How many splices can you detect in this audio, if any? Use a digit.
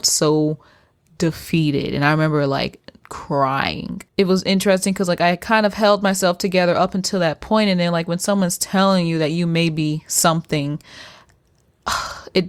1